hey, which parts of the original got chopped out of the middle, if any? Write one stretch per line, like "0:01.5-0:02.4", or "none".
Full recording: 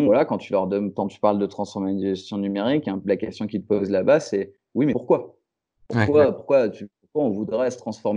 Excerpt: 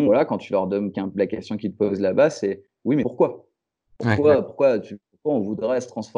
0:00.9-0:02.8